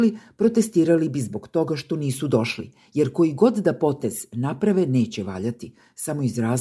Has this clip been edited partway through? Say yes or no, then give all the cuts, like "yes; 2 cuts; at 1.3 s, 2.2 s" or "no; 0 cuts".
no; 0 cuts